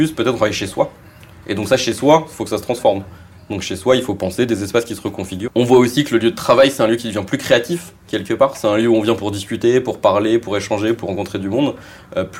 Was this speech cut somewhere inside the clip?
yes; 1 cut; at 5.5 s

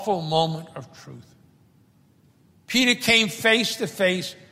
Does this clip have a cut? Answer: no; 0 cuts

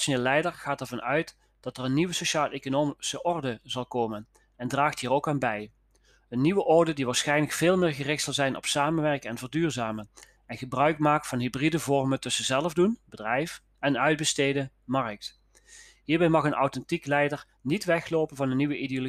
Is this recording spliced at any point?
no; 0 cuts

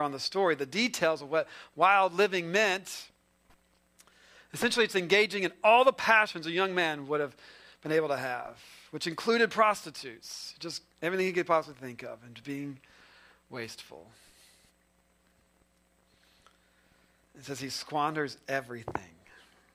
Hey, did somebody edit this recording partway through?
yes; 1 cut; at 10.9 s

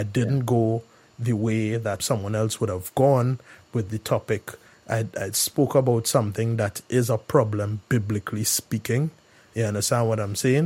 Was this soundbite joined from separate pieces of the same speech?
yes; 1 cut; at 2.0 s

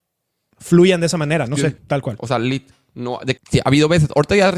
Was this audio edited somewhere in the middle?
yes; 2 cuts; at 1.8 s, 3.4 s

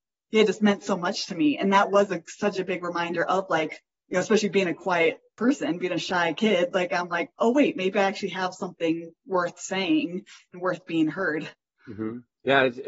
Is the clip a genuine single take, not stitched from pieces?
yes; 0 cuts

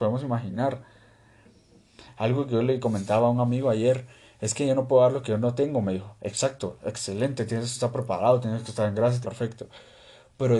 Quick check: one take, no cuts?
no; 1 cut; at 9.2 s

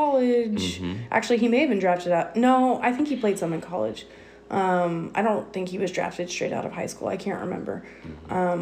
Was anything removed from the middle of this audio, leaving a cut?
no; 0 cuts

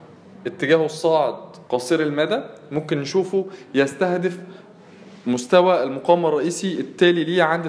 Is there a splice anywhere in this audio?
yes; 1 cut; at 1.7 s

